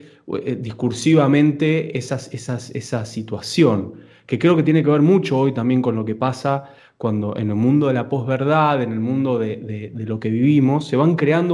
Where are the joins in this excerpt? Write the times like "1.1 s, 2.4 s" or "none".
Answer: none